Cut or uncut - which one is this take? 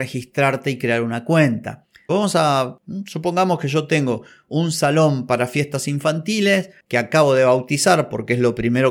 cut